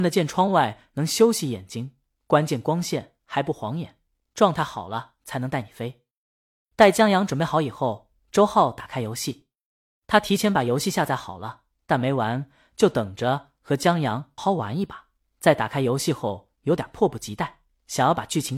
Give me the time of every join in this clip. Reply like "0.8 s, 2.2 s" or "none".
14.4 s